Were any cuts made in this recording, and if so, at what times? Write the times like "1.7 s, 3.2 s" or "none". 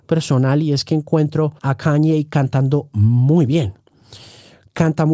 1.6 s

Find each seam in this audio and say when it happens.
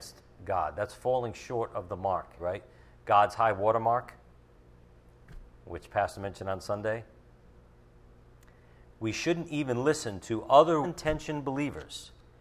2.4 s, 8.9 s, 10.8 s

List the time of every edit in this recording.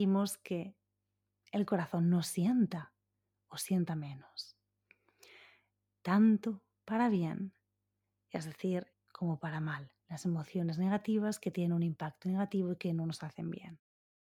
8.9 s, 10.0 s

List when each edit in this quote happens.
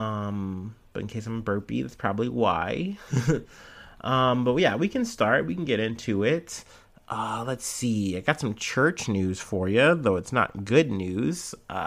none

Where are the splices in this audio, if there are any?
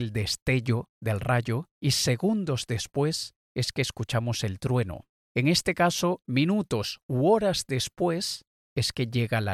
6.2 s

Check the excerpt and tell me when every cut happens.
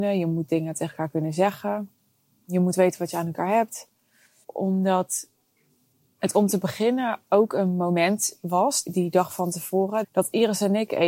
4.4 s, 10.0 s

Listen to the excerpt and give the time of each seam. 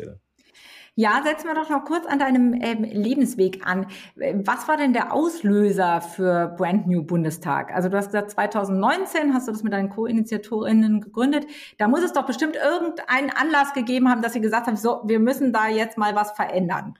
none

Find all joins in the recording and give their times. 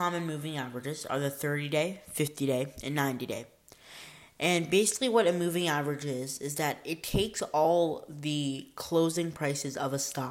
none

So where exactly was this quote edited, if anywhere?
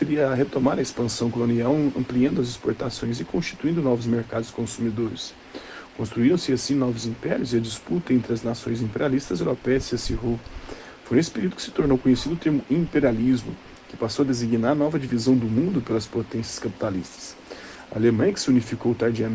none

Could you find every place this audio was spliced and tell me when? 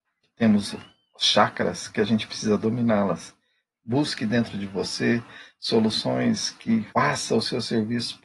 3.7 s, 6.9 s

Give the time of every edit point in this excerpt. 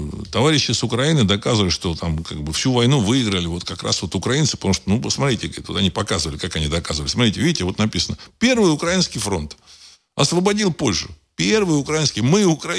none

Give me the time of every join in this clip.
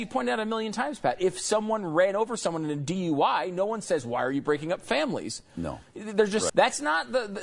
6.5 s

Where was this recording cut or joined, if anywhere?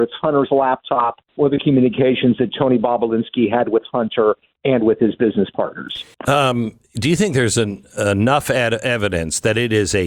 1.3 s, 6.1 s

